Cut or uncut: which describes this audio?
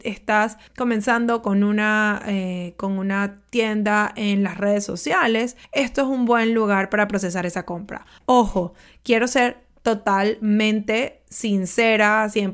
uncut